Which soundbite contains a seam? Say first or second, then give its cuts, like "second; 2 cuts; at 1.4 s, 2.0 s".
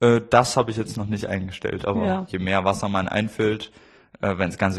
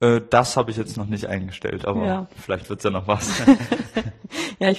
first; 1 cut; at 2.3 s